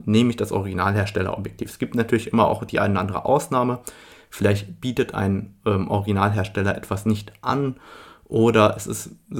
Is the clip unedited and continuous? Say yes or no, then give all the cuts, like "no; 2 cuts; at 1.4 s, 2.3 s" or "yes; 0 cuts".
yes; 0 cuts